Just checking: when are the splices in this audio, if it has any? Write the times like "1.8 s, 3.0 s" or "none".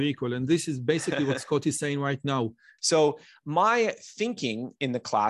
2.8 s